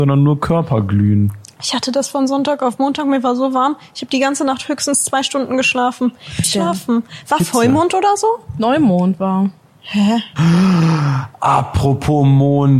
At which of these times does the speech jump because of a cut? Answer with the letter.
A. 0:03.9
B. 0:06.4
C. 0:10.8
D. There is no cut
B